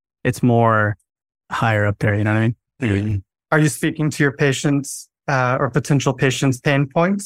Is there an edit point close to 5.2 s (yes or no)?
no